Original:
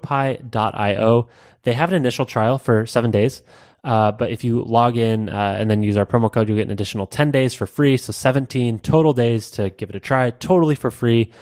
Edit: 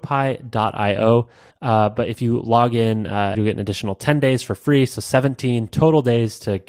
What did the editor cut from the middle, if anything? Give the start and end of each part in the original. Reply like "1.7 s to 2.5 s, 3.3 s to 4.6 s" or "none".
1.5 s to 3.7 s, 5.6 s to 6.5 s